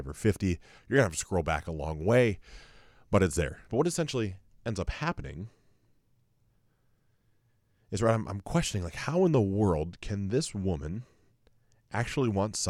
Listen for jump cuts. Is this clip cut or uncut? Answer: cut